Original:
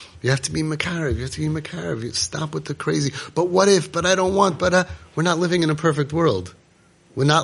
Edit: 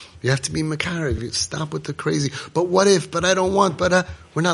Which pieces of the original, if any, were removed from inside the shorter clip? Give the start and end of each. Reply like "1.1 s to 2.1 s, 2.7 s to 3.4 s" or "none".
1.2 s to 2.0 s

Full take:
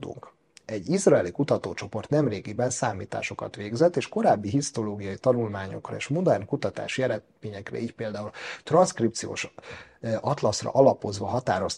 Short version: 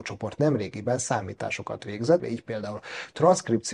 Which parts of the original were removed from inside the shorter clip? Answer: 3.9 s to 7.7 s

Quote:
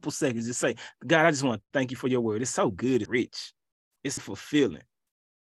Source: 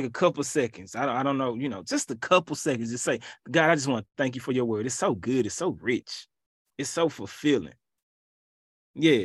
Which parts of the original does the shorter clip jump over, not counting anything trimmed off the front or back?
5.5 s to 5.8 s, 6.9 s to 7.1 s

